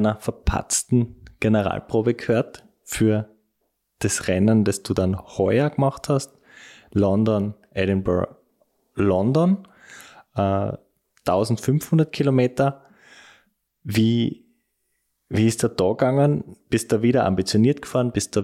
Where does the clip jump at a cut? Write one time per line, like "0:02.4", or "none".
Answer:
none